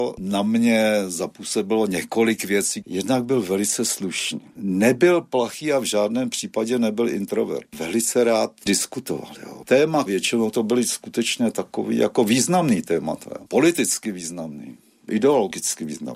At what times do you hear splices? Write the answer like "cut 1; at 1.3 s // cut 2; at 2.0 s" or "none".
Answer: cut 1; at 4.5 s // cut 2; at 10.1 s

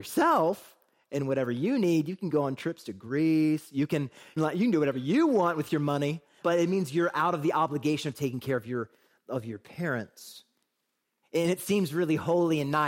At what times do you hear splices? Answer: cut 1; at 4.4 s // cut 2; at 6.4 s // cut 3; at 11.2 s

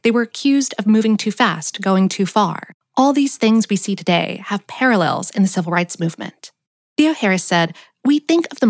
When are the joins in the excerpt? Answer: cut 1; at 6.9 s

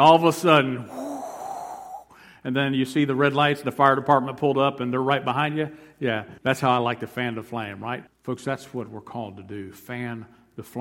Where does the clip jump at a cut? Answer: cut 1; at 6.4 s // cut 2; at 8.1 s

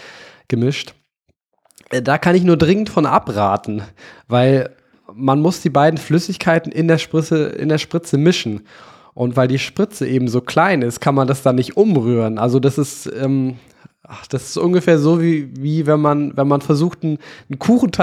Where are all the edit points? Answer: none

